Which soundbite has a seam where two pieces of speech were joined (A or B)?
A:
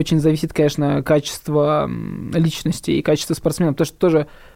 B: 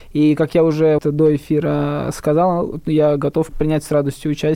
B